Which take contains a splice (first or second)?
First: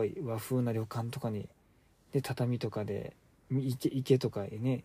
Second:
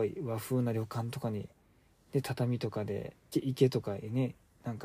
second